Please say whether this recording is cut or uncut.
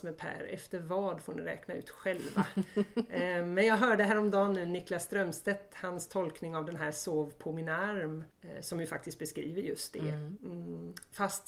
cut